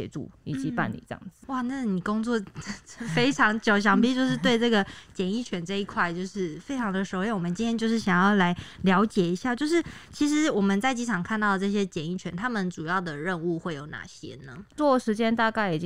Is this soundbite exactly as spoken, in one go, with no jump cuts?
no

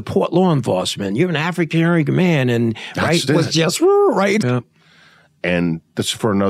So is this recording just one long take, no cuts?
no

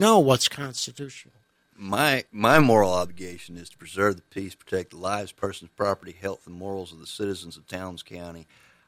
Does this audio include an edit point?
yes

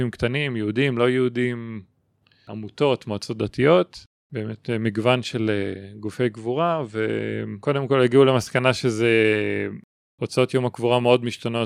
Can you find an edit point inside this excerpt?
no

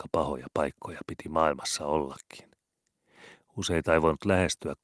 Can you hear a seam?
no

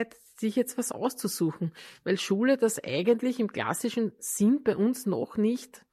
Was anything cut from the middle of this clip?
no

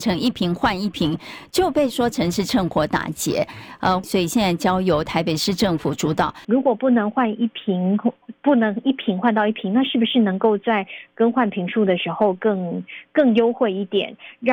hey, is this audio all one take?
no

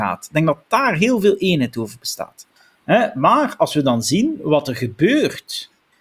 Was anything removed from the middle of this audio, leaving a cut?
no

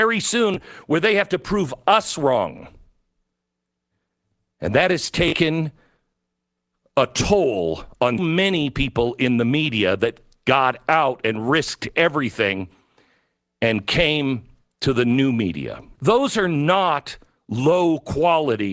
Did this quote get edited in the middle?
yes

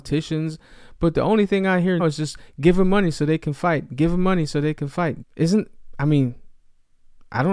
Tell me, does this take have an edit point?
yes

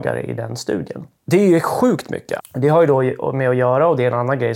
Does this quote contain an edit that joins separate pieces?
yes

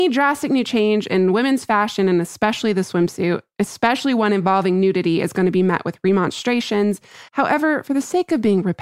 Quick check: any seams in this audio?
yes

